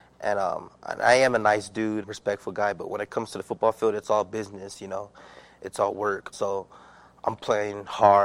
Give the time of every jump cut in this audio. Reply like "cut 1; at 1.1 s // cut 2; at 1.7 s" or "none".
cut 1; at 2.0 s // cut 2; at 6.3 s